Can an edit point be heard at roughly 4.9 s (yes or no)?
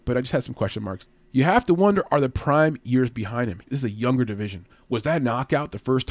no